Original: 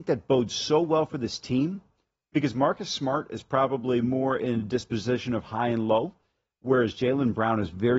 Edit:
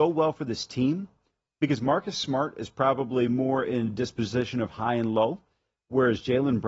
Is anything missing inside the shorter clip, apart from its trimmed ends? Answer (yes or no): no